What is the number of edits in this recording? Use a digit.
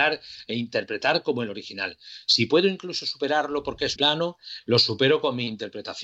1